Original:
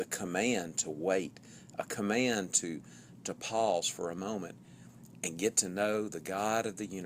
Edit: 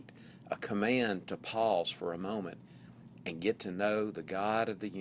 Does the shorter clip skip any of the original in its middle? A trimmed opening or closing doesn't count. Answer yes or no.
yes